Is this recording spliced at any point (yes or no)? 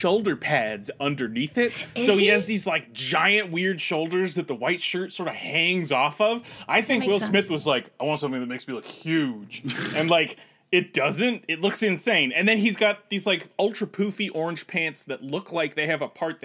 no